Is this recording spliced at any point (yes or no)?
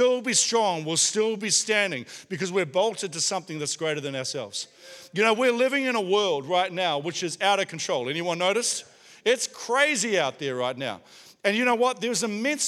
no